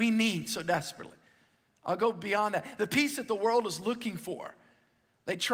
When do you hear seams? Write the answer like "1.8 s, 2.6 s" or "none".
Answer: none